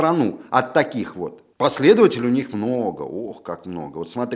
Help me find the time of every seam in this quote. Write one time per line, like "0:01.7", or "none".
0:01.5